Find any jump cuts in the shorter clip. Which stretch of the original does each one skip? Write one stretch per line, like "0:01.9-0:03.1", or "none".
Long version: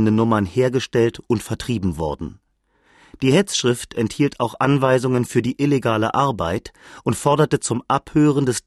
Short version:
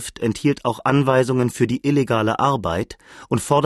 none